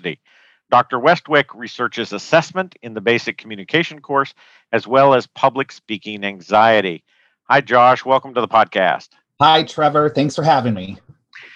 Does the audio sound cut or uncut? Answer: uncut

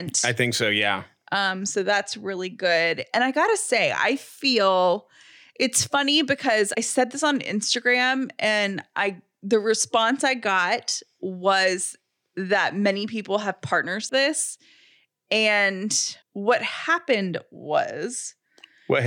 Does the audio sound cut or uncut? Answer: cut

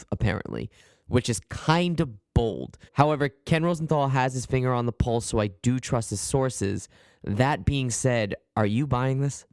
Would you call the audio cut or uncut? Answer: cut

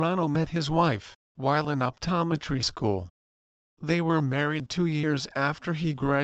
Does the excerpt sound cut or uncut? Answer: cut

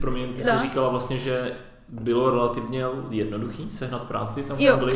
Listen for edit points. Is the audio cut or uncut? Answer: uncut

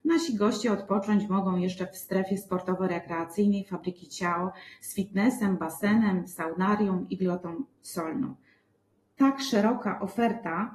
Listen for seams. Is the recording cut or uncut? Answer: uncut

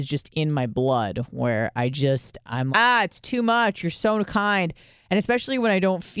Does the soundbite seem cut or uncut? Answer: cut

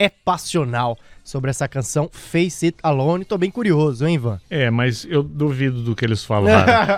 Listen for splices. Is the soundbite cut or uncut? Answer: cut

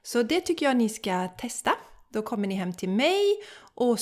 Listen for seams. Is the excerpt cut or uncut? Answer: uncut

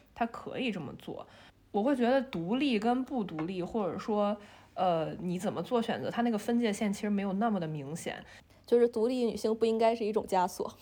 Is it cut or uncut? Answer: uncut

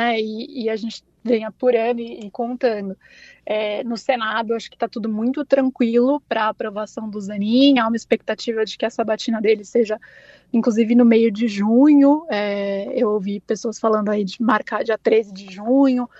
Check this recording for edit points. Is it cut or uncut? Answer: uncut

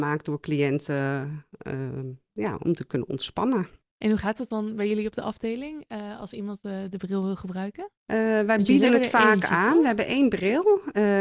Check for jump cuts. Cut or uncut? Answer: uncut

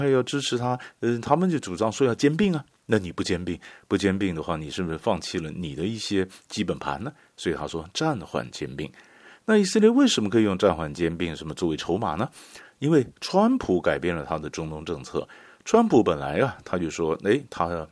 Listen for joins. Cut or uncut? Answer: uncut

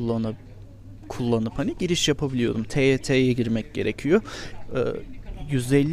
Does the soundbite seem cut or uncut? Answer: uncut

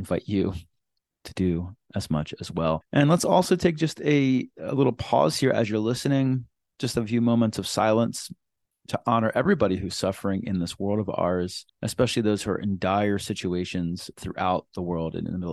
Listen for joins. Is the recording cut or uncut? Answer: uncut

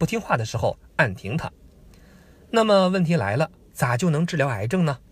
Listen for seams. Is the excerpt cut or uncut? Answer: uncut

